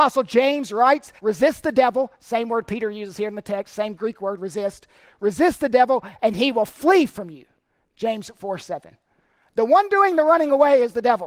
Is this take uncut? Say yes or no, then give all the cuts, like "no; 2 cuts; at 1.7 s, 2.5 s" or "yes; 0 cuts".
no; 1 cut; at 1.2 s